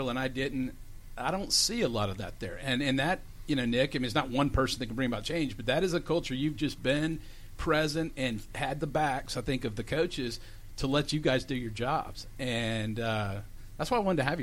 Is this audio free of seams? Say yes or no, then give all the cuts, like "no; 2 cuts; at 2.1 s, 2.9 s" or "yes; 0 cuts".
yes; 0 cuts